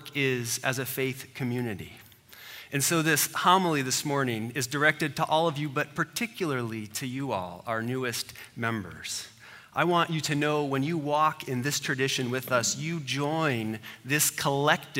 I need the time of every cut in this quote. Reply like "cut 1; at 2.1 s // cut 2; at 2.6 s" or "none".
none